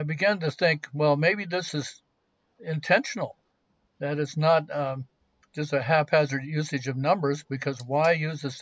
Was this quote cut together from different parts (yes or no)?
no